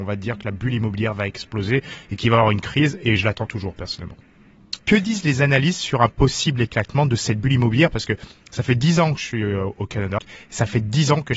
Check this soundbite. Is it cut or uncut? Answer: cut